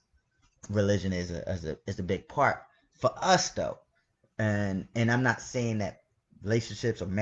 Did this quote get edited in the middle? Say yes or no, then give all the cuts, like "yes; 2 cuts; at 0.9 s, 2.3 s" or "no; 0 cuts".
no; 0 cuts